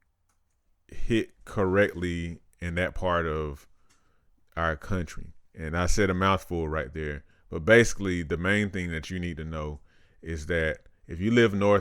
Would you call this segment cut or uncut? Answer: cut